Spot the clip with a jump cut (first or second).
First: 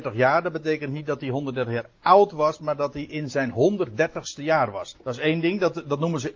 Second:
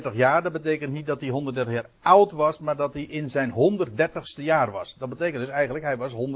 first